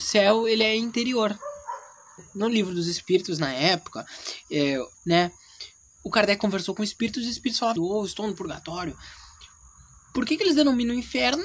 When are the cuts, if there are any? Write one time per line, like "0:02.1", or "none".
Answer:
0:04.9
0:07.8